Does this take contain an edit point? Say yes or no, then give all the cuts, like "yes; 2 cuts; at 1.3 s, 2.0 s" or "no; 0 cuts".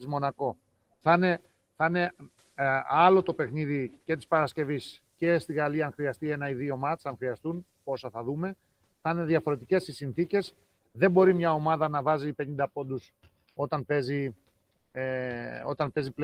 no; 0 cuts